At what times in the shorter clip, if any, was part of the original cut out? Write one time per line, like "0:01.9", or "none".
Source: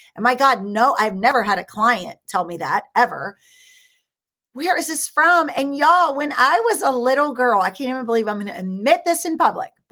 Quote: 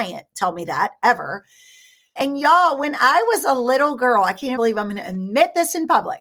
0:02.2
0:04.6